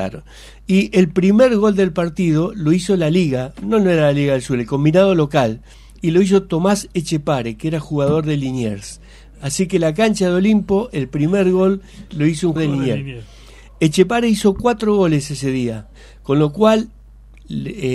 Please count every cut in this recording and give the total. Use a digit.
1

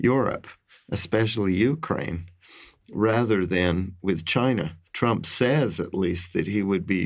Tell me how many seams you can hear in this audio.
1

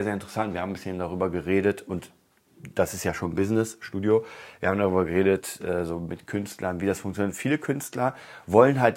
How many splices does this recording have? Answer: 0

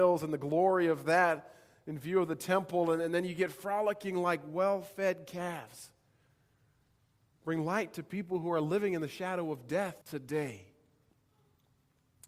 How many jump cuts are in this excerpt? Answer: 2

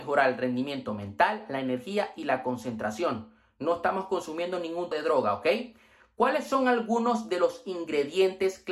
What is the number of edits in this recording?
1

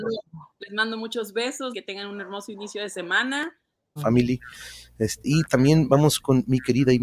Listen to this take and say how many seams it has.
3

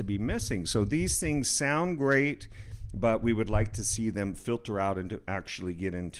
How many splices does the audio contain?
0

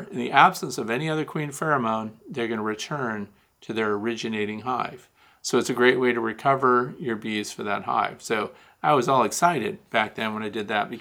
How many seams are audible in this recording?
0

